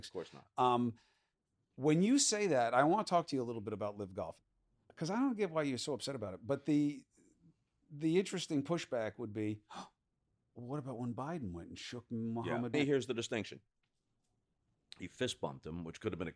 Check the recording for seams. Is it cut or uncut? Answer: cut